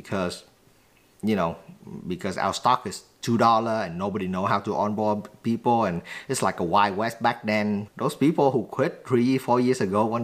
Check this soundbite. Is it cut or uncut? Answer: uncut